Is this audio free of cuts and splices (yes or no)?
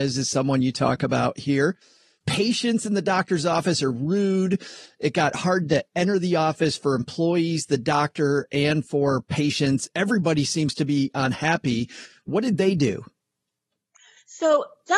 yes